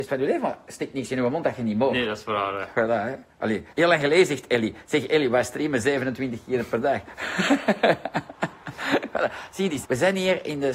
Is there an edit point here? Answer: yes; 2 cuts; at 3.7 s, 9.8 s

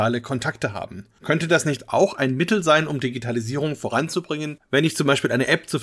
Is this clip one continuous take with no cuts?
yes; 0 cuts

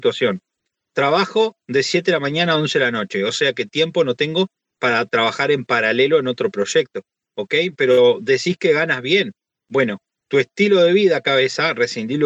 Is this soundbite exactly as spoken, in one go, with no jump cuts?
yes; 0 cuts

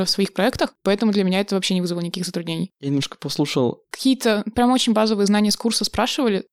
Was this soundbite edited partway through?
yes; 2 cuts; at 2.7 s, 3.8 s

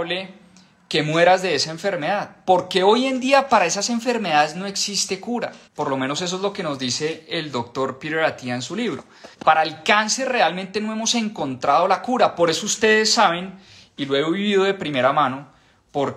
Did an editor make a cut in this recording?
yes; 2 cuts; at 5.7 s, 9.3 s

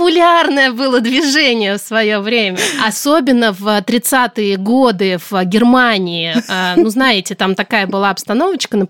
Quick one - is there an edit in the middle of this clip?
no; 0 cuts

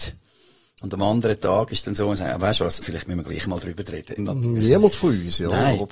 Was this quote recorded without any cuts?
no; 2 cuts; at 2.8 s, 4.2 s

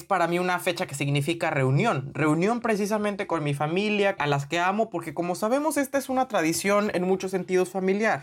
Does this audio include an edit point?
yes; 1 cut; at 4.2 s

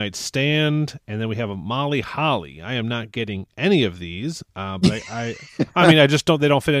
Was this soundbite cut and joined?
no; 0 cuts

